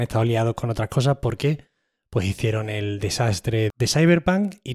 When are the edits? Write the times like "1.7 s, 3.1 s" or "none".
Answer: none

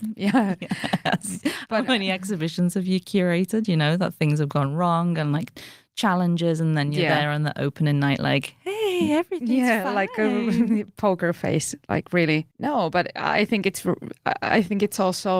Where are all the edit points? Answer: 12.5 s

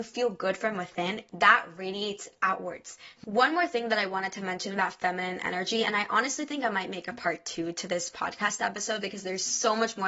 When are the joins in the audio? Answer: 1.3 s, 3.1 s

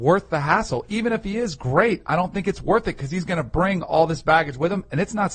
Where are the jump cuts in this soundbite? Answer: none

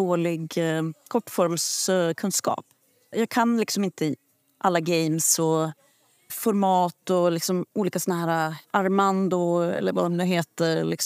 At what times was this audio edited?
3.1 s, 6.3 s, 8.6 s

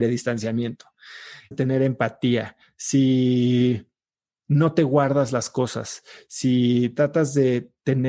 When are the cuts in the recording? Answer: 1.5 s

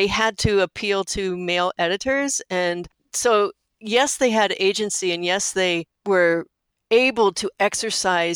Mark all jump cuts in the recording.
none

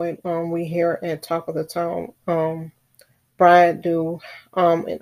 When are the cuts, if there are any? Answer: none

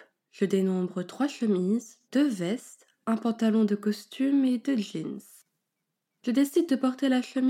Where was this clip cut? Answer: 2.0 s

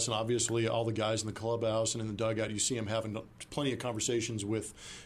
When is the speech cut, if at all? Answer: none

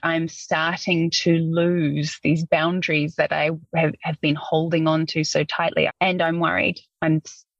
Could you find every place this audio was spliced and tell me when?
5.9 s

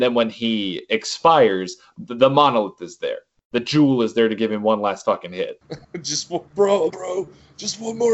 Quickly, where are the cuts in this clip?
6.9 s

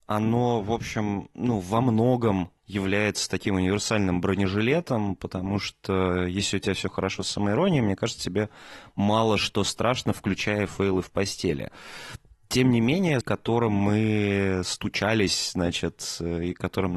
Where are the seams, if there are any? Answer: 2.6 s, 13.2 s

